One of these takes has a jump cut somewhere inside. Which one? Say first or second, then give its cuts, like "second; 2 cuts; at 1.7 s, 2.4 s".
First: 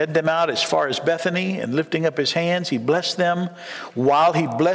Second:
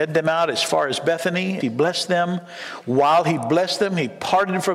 second; 1 cut; at 1.6 s